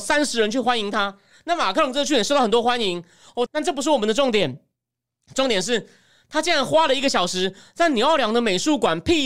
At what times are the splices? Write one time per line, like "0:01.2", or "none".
0:03.5